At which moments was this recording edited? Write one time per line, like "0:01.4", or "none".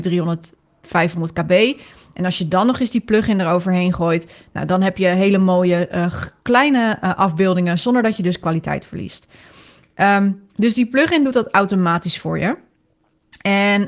none